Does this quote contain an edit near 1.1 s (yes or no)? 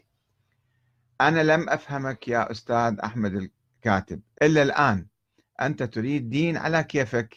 no